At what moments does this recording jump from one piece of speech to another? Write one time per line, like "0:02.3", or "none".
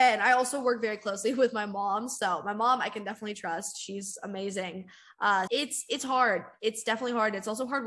0:05.5